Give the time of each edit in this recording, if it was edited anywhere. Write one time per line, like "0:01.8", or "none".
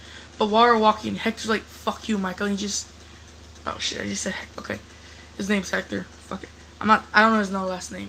0:04.5